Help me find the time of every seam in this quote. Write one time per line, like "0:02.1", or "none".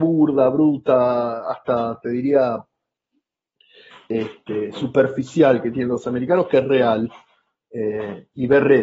none